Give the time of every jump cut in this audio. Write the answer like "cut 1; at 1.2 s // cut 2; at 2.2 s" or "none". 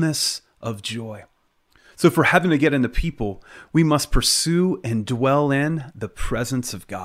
none